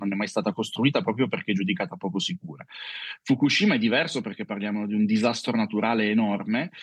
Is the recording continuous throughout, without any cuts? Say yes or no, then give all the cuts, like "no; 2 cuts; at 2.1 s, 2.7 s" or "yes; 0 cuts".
yes; 0 cuts